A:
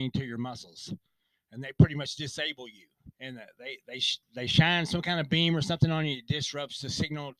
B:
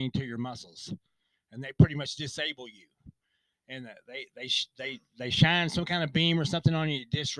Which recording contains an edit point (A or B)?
A